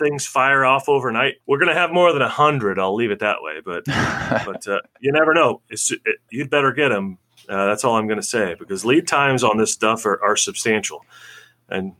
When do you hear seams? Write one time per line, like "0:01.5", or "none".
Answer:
0:01.4
0:06.3

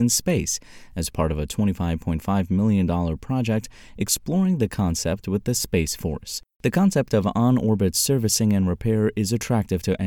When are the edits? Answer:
0:06.5

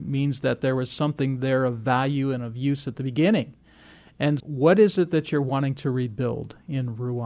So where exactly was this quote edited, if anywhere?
0:04.4

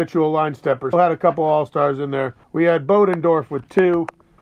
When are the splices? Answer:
0:00.9
0:02.4

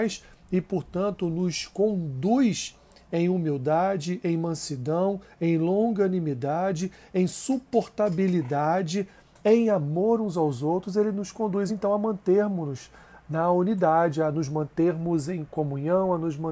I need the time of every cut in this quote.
none

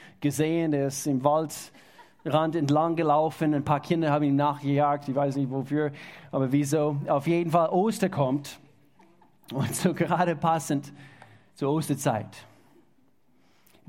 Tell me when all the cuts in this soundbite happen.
none

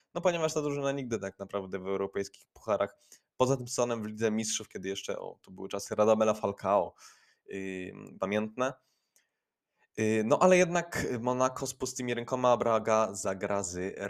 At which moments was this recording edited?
0:08.2

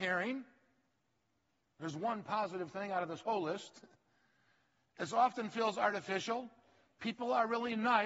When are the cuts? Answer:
none

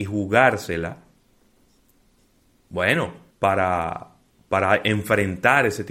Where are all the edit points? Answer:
0:03.3

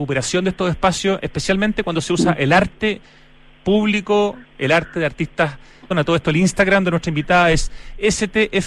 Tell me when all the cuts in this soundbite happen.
0:05.9

